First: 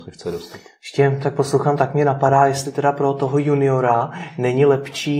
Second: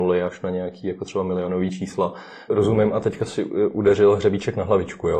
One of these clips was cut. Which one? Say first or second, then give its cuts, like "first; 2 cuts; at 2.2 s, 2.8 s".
second; 1 cut; at 2.5 s